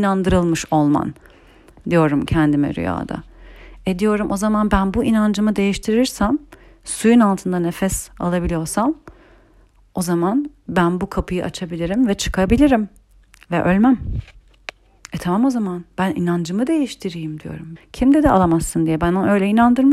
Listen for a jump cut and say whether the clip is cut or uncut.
cut